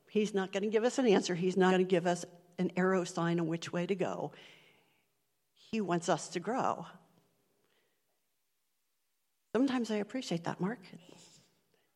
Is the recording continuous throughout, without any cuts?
no; 1 cut; at 1.7 s

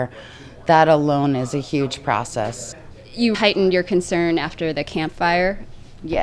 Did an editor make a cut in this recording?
yes; 1 cut; at 3.3 s

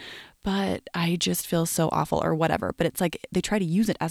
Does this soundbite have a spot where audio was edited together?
no; 0 cuts

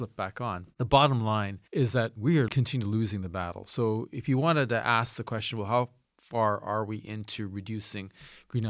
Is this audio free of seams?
yes; 0 cuts

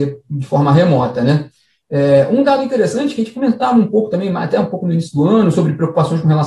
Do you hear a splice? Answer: no; 0 cuts

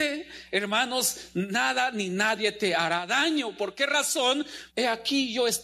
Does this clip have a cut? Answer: yes; 1 cut; at 4.7 s

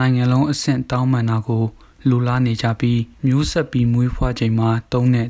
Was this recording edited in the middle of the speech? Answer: yes; 1 cut; at 3.1 s

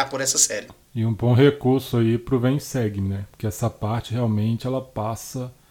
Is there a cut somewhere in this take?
no; 0 cuts

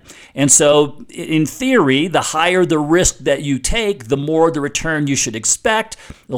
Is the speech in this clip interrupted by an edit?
no; 0 cuts

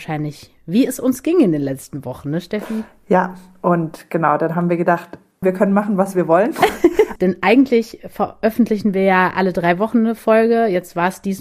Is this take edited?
yes; 2 cuts; at 5.4 s, 7.2 s

